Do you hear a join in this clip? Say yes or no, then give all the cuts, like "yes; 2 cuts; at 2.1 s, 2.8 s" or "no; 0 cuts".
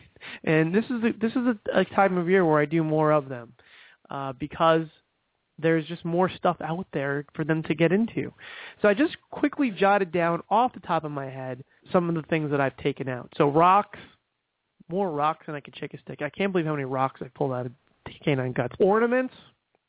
yes; 2 cuts; at 11.8 s, 18.8 s